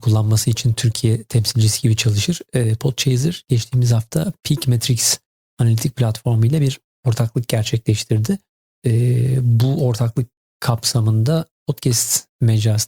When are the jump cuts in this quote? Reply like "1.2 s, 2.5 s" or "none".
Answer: none